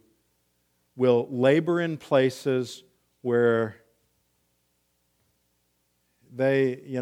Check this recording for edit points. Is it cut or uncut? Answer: uncut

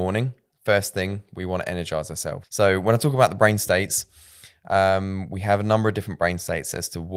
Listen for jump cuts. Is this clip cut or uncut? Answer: cut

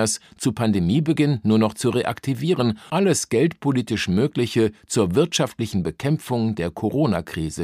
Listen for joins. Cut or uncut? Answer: cut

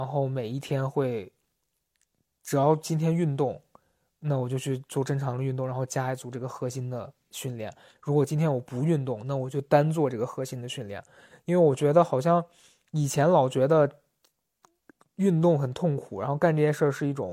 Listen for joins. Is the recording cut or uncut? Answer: uncut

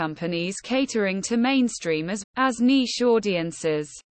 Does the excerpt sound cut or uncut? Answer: cut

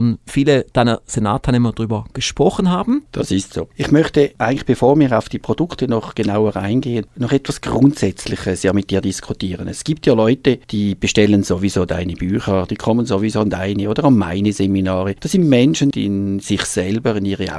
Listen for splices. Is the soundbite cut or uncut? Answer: cut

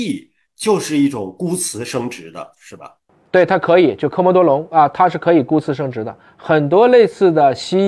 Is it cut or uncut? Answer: uncut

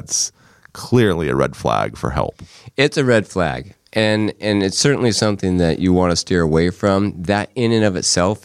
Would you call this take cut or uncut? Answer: uncut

